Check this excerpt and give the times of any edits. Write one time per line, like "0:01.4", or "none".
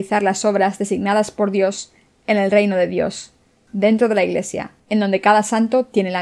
0:03.7
0:04.8